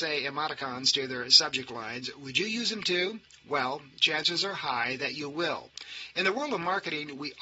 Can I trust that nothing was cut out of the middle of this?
yes; 0 cuts

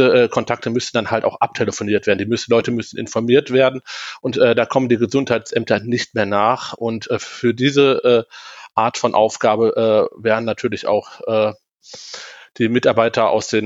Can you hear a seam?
no; 0 cuts

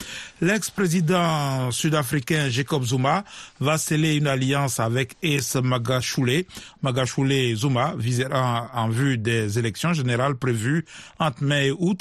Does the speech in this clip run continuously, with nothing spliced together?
no; 1 cut; at 6.8 s

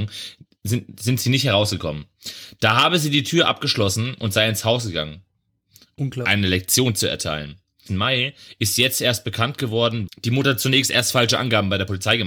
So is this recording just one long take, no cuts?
no; 3 cuts; at 6.0 s, 7.9 s, 10.1 s

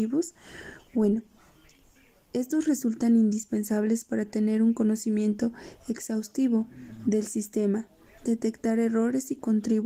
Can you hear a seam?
no; 0 cuts

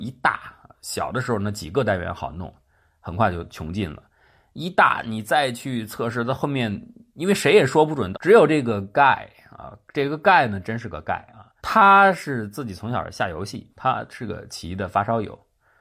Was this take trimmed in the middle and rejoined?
yes; 3 cuts; at 8.1 s, 11.6 s, 13.7 s

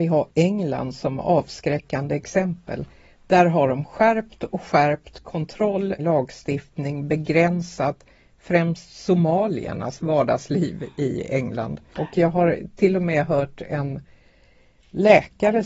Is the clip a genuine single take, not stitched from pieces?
no; 2 cuts; at 6.0 s, 11.9 s

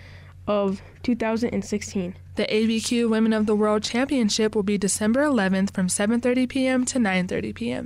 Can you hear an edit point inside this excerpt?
yes; 1 cut; at 2.3 s

